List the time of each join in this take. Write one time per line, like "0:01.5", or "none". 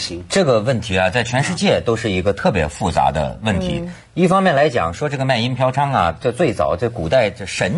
none

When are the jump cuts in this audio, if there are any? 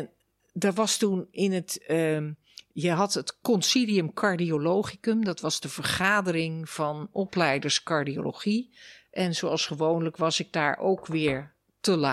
none

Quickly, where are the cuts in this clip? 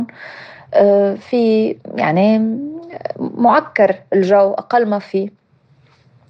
none

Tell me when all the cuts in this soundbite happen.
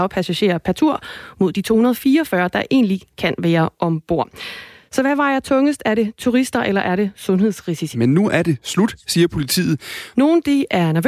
0:07.9
0:10.1

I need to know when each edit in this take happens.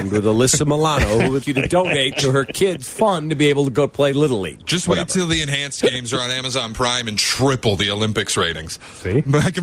0:01.4

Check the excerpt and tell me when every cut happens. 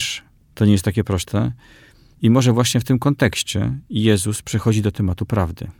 none

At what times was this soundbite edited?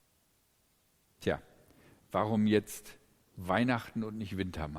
0:01.0

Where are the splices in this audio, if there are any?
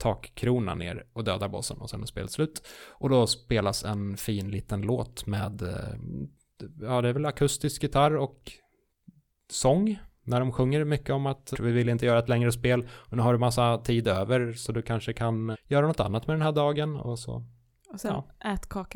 0:11.5
0:15.5

